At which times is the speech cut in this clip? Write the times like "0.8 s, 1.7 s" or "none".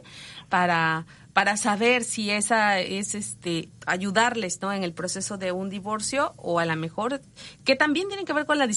3.7 s